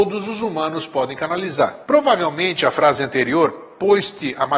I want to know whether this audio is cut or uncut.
cut